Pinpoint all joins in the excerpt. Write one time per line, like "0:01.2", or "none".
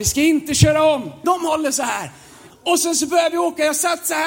0:01.2
0:02.5